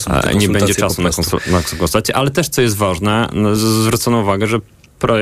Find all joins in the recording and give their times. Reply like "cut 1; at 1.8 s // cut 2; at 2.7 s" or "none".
none